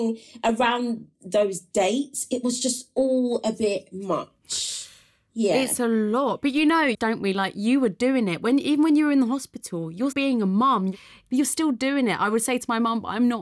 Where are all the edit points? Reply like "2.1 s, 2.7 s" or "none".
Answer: 7.0 s, 10.1 s